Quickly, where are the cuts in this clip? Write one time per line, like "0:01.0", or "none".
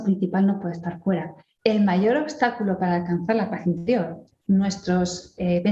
0:01.6
0:04.3